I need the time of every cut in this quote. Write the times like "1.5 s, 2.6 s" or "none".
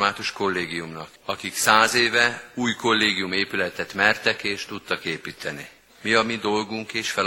1.2 s